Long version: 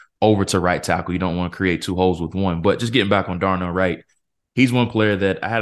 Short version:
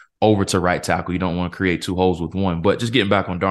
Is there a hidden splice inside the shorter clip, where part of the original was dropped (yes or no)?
no